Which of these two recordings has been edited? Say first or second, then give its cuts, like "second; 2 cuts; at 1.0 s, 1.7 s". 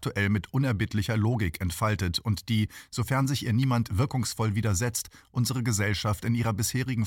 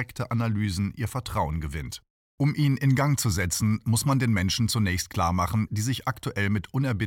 second; 2 cuts; at 2.2 s, 5.7 s